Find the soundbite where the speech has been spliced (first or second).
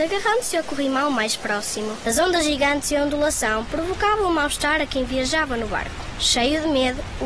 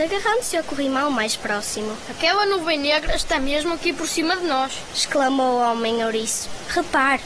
first